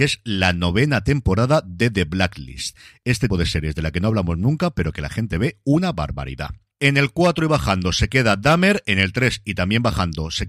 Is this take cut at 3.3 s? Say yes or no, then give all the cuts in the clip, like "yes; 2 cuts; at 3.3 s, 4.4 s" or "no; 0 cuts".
yes; 1 cut; at 3.3 s